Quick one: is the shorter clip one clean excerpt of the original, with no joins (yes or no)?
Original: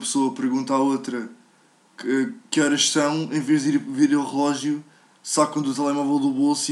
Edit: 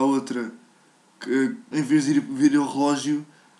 no